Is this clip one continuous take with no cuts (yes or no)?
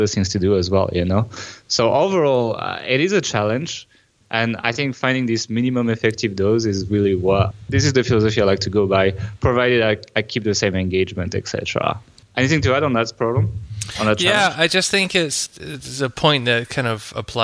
yes